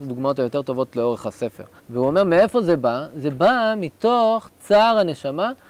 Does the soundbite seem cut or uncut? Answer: cut